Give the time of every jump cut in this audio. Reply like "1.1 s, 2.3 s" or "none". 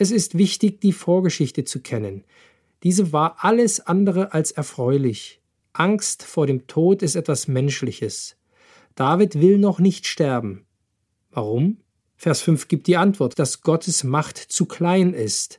5.6 s, 13.3 s